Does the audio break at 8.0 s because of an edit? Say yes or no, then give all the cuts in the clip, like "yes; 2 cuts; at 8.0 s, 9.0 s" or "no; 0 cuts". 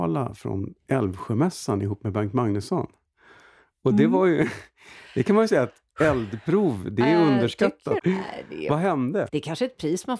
yes; 2 cuts; at 8.0 s, 9.3 s